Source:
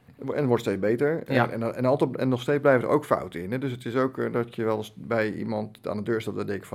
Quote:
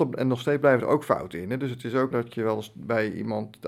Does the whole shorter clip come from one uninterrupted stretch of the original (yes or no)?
no